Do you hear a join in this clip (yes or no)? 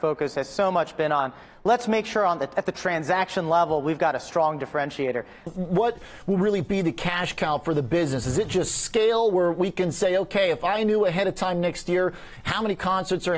yes